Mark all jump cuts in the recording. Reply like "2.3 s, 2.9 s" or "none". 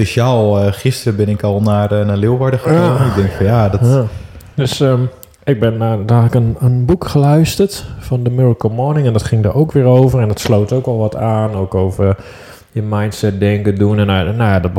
none